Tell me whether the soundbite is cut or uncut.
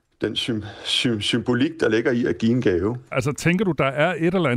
cut